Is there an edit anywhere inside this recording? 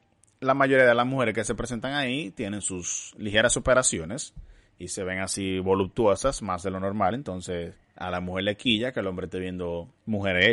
no; 0 cuts

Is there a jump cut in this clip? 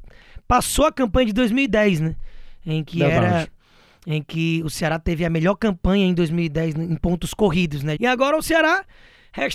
yes; 1 cut; at 8.0 s

